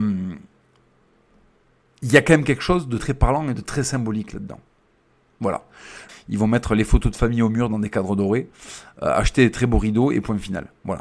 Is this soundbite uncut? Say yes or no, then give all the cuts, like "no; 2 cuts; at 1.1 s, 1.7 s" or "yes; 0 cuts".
no; 2 cuts; at 3.0 s, 6.1 s